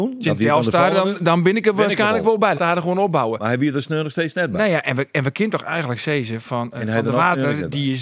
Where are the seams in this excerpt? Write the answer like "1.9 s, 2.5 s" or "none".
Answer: 2.5 s